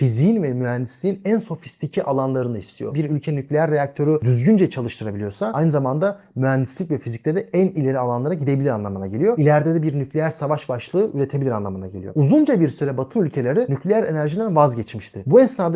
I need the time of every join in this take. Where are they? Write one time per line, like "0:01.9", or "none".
none